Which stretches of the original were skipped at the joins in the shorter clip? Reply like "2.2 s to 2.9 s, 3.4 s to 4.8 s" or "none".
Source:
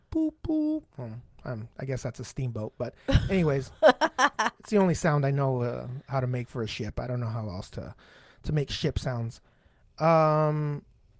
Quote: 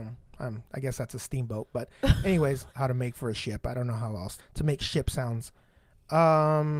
3.7 s to 6.0 s, 7.7 s to 8.3 s